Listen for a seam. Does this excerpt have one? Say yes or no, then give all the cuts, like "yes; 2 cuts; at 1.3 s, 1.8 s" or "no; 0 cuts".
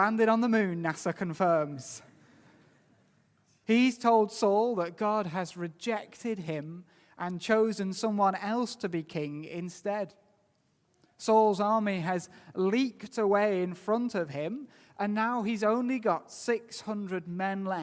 yes; 1 cut; at 3.6 s